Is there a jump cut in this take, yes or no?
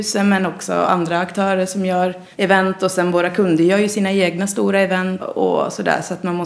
yes